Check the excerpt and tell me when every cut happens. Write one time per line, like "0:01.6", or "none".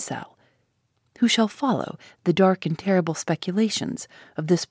0:01.1